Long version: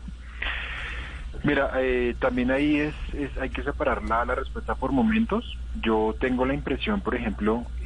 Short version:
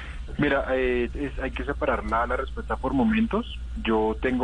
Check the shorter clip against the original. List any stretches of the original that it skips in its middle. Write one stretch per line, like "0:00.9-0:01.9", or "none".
0:02.2-0:03.1